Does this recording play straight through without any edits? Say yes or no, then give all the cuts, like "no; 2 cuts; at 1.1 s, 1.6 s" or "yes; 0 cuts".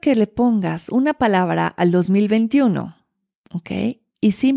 yes; 0 cuts